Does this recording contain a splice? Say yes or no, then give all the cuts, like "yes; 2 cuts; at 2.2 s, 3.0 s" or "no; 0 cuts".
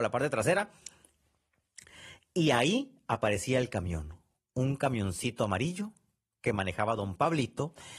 no; 0 cuts